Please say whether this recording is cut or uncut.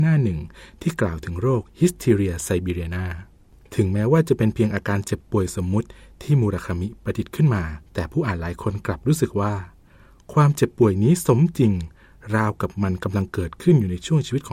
cut